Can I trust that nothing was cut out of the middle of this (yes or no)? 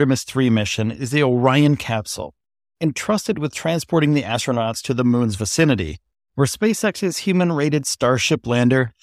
yes